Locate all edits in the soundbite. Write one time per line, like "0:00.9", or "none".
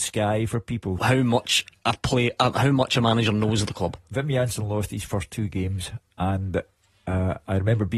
0:01.0